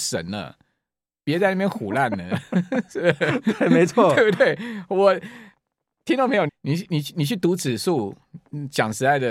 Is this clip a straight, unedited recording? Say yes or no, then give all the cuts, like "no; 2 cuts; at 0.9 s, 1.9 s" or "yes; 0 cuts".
no; 1 cut; at 6.5 s